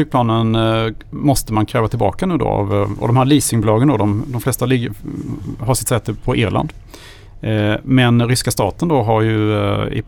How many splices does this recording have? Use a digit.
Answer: 0